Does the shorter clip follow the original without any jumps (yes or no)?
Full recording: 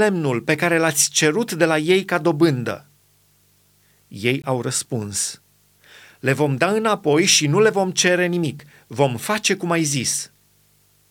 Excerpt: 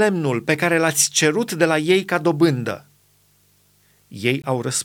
yes